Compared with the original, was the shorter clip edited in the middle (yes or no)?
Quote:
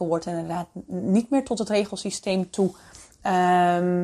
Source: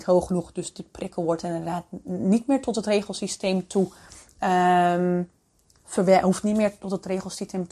no